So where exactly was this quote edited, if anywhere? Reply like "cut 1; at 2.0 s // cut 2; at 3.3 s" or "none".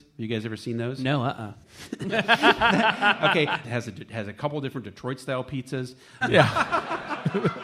cut 1; at 1.6 s // cut 2; at 3.6 s // cut 3; at 6.2 s